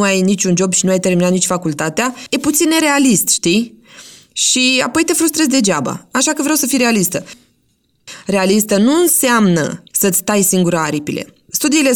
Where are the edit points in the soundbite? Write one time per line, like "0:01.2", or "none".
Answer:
none